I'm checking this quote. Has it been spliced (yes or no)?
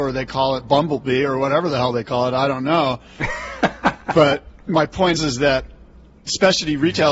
yes